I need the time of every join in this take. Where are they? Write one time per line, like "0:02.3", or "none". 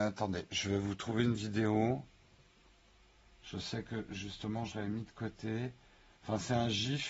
none